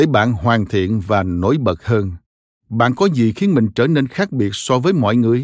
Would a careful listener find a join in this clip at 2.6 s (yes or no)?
yes